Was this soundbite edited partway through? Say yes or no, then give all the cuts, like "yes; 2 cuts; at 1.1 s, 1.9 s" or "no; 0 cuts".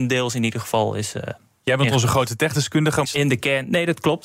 yes; 1 cut; at 3.0 s